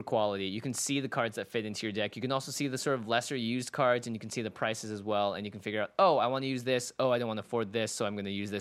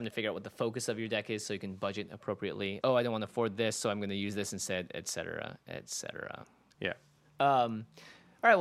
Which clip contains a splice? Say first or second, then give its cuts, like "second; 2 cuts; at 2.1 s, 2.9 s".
second; 2 cuts; at 2.8 s, 6.7 s